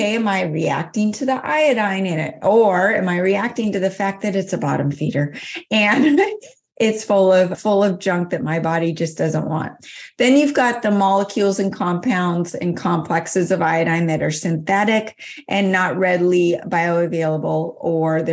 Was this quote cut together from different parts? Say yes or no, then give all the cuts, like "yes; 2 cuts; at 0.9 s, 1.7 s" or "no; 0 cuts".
yes; 1 cut; at 7.5 s